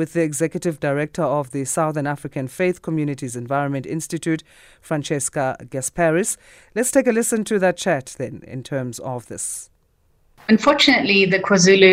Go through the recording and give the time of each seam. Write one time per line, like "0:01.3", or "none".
none